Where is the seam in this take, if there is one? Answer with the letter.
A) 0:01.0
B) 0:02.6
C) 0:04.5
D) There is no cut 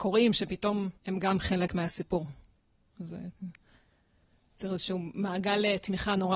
A